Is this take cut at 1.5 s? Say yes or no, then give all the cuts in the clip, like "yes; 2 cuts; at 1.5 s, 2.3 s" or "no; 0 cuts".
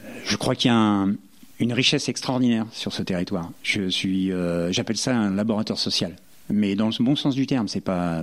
yes; 1 cut; at 1.5 s